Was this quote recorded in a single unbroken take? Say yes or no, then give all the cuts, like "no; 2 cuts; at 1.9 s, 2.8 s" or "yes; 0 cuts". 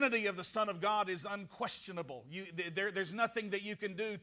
yes; 0 cuts